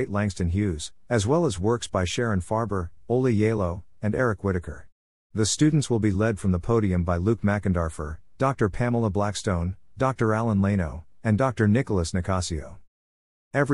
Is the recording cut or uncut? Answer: uncut